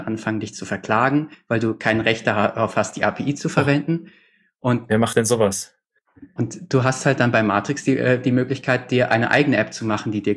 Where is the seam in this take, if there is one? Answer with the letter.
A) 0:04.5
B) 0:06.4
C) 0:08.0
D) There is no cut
B